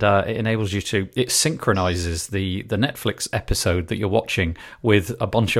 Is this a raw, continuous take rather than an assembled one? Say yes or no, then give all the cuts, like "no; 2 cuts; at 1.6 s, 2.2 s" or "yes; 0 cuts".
yes; 0 cuts